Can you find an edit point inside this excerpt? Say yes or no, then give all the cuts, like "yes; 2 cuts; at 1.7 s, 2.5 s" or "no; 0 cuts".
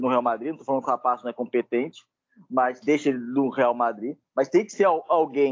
no; 0 cuts